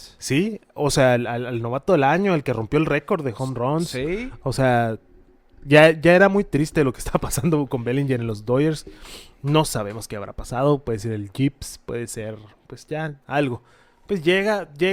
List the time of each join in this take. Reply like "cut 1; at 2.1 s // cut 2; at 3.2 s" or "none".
cut 1; at 13.2 s